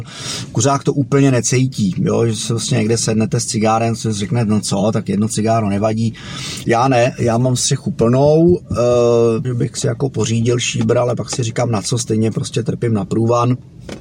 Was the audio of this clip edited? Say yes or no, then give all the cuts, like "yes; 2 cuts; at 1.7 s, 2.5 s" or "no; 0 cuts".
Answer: yes; 2 cuts; at 6.6 s, 9.4 s